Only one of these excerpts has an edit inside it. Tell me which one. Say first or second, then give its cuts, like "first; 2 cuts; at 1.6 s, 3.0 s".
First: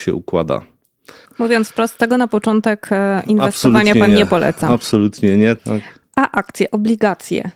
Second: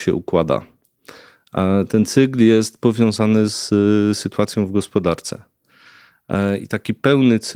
first; 2 cuts; at 1.2 s, 5.6 s